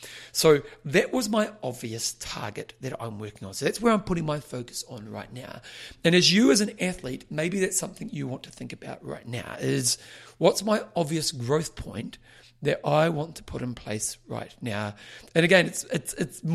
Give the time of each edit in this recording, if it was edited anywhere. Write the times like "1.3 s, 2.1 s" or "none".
none